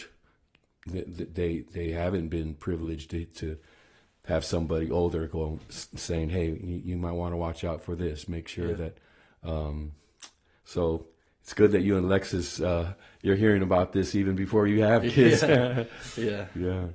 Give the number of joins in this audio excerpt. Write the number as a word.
zero